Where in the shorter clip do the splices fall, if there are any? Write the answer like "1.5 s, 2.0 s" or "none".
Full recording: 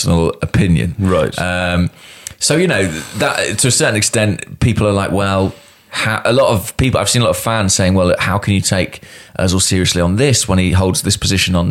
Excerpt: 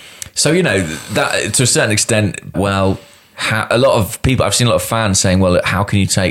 2.5 s

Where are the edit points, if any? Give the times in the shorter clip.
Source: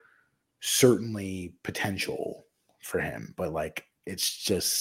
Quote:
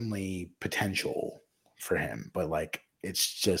none

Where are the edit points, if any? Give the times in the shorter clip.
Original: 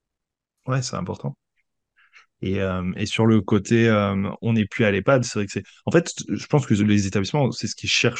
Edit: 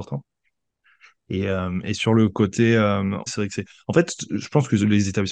3.3 s

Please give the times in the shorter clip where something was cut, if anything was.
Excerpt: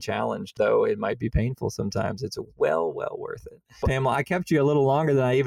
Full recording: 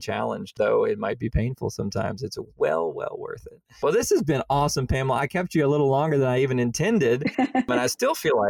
3.8 s

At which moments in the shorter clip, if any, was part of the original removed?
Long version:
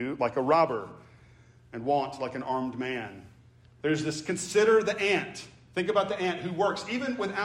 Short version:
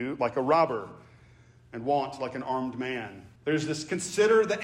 3.4 s

